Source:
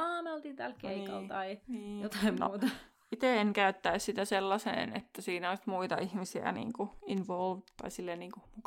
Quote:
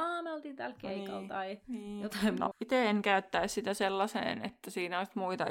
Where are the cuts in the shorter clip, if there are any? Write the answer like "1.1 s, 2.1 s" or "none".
2.5 s

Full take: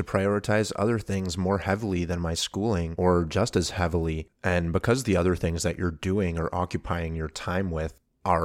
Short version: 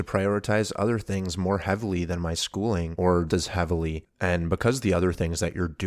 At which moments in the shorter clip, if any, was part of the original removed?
3.3 s

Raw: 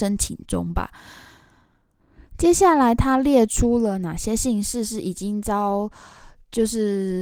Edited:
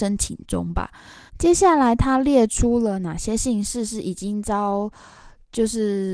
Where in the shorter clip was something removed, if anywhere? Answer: 1.3 s

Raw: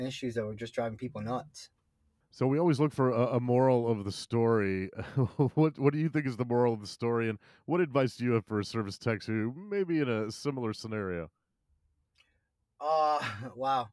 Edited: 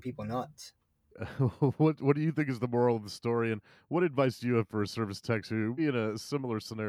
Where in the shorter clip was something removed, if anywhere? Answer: 1.1 s, 5.8 s

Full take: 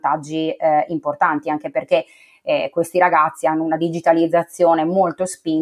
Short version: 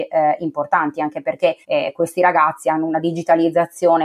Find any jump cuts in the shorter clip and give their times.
1.6 s

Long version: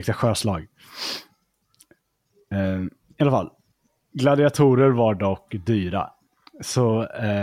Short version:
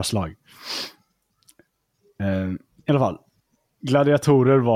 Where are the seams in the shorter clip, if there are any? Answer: none

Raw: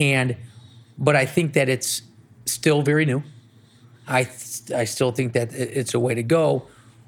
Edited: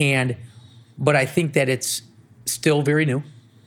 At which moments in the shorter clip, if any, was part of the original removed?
none

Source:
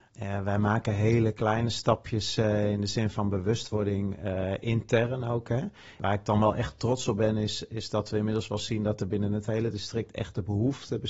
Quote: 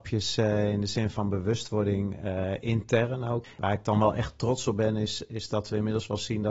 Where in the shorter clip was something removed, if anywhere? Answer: 3.4 s

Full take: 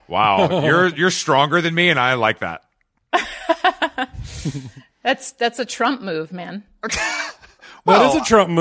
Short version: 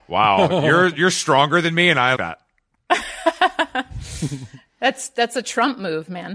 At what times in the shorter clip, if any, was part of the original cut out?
2.2 s

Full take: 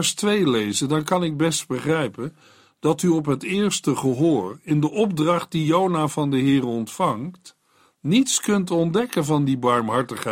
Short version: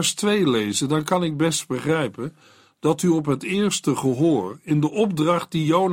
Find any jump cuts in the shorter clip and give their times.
none

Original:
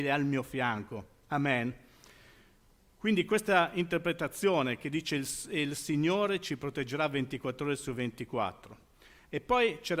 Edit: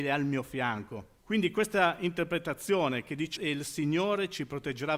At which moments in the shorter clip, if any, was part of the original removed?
1.2 s, 3.4 s

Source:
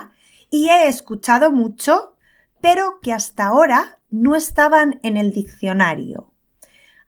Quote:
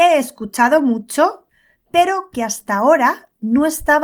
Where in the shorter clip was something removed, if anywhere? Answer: none

